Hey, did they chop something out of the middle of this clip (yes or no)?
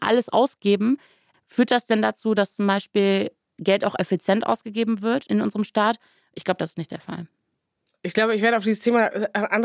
yes